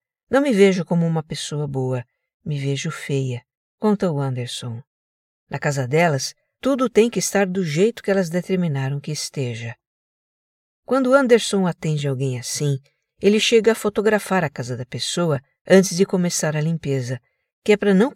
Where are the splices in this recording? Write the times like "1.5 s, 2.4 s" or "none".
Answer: 5.3 s, 6.6 s